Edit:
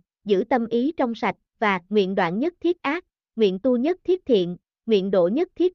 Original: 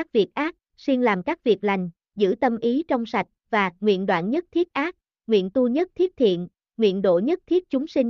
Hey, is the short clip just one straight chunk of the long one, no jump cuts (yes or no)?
yes